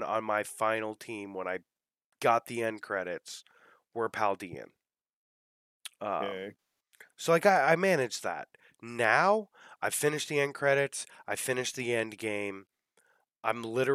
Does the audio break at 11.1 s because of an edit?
no; 0 cuts

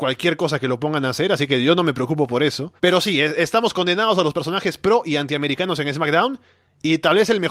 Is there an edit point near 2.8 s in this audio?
yes; 1 cut; at 2.8 s

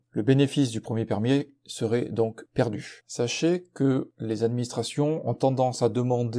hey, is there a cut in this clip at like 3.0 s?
yes; 1 cut; at 3.0 s

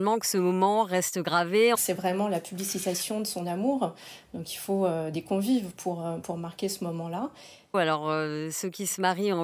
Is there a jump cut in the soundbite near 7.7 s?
yes; 2 cuts; at 1.7 s, 7.7 s

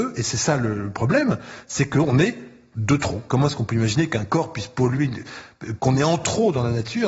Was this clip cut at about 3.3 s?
yes; 2 cuts; at 3.3 s, 5.8 s

